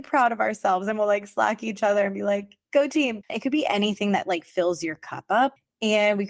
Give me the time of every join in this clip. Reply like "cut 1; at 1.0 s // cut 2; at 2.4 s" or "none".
cut 1; at 3.3 s